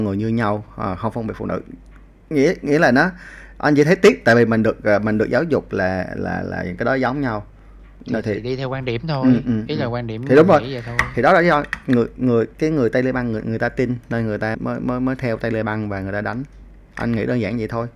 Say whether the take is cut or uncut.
cut